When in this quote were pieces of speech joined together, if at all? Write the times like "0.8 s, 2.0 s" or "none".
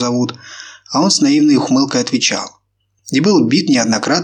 none